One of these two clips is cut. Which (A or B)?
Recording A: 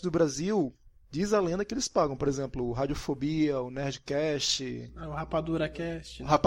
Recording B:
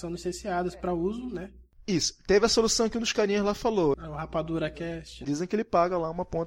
B